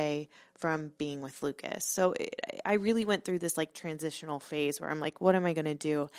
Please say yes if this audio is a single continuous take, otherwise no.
yes